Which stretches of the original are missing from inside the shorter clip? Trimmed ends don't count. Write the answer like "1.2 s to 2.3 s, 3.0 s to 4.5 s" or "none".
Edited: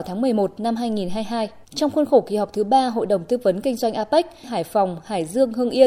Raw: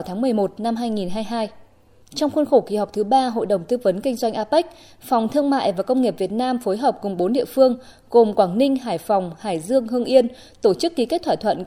1.6 s to 2.0 s, 4.8 s to 8.8 s